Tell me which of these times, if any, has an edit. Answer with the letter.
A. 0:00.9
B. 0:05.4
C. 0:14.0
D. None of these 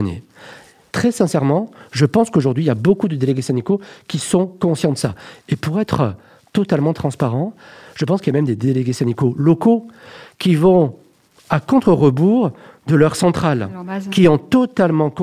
A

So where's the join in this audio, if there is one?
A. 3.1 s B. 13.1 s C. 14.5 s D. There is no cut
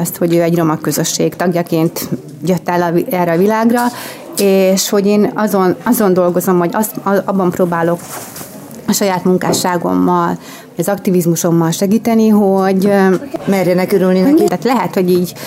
C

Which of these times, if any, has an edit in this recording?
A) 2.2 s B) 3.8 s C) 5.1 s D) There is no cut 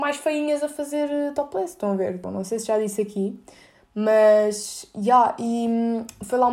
A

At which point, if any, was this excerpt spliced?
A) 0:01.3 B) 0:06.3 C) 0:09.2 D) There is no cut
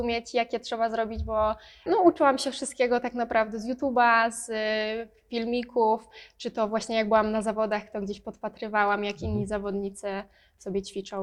D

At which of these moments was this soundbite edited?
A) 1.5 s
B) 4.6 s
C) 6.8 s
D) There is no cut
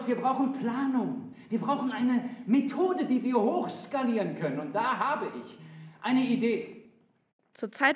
D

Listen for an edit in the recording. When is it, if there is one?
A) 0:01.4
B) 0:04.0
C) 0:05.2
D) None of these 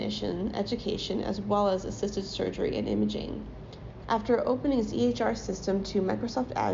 B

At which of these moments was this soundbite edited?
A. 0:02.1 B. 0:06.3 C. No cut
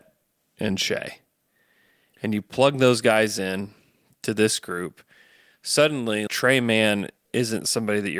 B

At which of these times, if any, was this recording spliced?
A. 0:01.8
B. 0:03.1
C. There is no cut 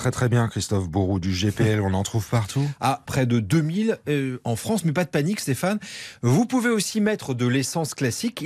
B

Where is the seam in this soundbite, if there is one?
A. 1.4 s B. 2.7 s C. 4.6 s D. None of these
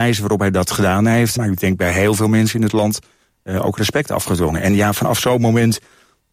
A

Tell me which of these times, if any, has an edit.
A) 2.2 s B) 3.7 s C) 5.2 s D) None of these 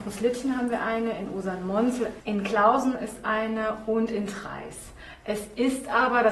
A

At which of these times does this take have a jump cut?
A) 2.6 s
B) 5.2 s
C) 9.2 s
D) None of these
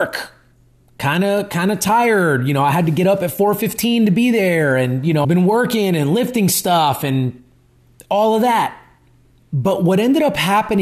B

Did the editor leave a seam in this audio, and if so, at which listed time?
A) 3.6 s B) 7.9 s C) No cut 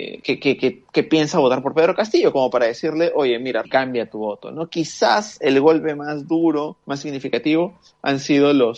A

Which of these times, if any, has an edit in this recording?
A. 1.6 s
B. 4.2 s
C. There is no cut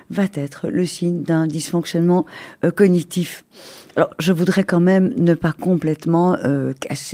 C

